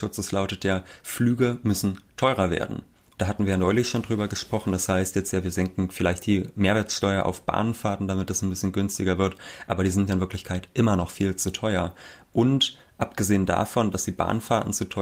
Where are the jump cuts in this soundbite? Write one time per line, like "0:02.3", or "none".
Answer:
0:03.2